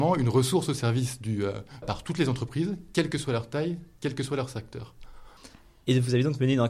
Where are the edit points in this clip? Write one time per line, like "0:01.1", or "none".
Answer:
0:01.8